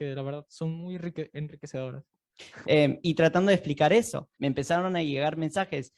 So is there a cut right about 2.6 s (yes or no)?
yes